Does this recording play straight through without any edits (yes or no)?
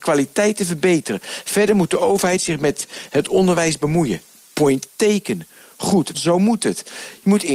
no